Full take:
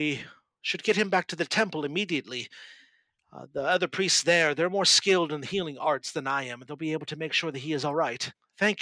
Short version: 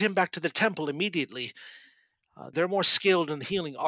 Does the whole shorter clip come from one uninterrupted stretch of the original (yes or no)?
no